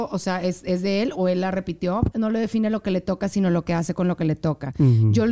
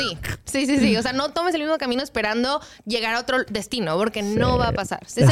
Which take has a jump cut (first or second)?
first